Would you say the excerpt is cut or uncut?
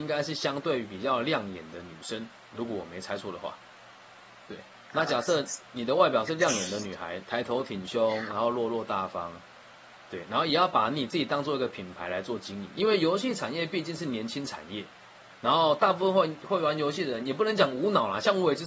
cut